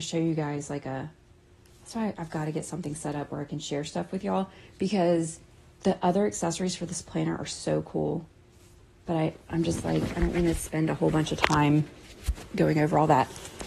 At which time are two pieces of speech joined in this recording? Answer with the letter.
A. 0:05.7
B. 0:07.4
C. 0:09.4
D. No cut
D